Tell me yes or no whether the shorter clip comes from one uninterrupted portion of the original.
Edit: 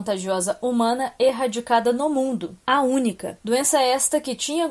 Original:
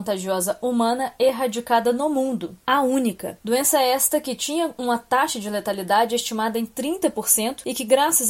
yes